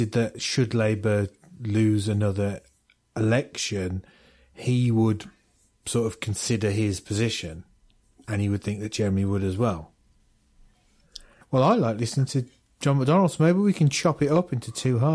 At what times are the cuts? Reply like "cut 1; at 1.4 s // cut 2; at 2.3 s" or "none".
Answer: cut 1; at 11.4 s